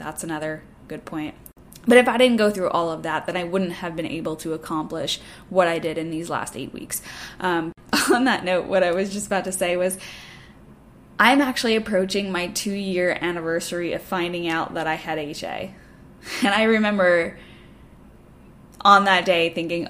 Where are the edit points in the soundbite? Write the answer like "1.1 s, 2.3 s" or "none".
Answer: none